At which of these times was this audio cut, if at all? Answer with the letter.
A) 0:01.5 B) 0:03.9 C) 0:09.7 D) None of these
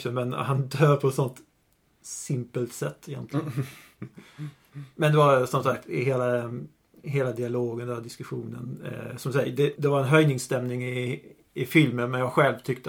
C